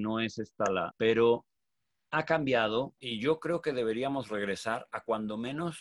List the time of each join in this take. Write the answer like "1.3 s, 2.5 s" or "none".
0.9 s, 3.0 s